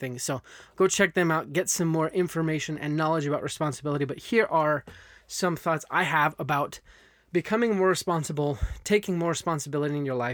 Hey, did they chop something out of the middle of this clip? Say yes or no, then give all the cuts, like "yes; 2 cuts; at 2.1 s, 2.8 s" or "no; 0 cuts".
no; 0 cuts